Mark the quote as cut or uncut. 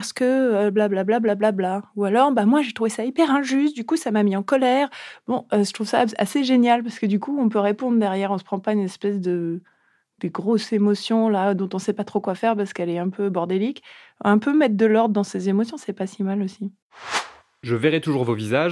uncut